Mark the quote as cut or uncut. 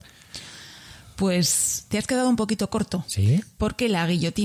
uncut